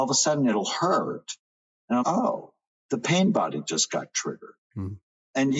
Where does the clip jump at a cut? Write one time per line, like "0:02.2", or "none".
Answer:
0:02.0